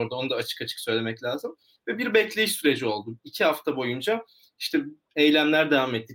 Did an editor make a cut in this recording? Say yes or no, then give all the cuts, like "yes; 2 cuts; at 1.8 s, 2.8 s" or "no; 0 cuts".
no; 0 cuts